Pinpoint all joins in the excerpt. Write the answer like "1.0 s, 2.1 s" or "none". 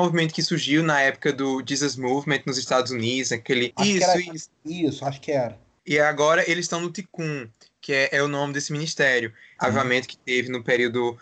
3.7 s, 9.6 s